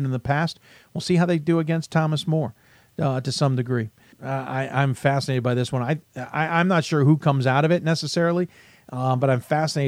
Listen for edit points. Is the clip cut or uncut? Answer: cut